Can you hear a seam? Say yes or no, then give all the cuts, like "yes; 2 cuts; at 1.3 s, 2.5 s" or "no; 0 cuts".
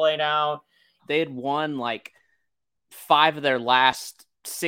yes; 1 cut; at 1.0 s